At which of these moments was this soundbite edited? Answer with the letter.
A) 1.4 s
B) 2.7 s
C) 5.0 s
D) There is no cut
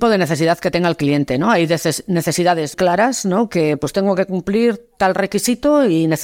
B